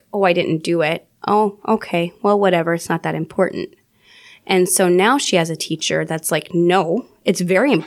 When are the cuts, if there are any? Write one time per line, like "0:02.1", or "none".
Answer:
none